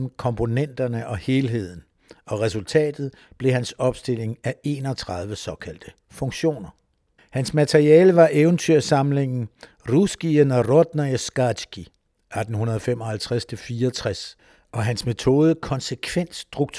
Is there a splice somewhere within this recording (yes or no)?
yes